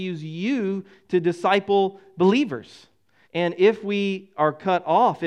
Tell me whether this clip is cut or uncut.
cut